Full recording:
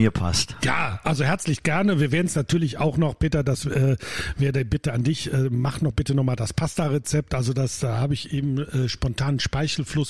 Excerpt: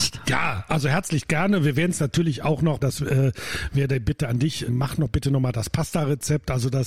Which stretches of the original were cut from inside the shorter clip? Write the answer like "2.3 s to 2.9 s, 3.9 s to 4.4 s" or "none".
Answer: 3.2 s to 3.4 s, 5.3 s to 5.5 s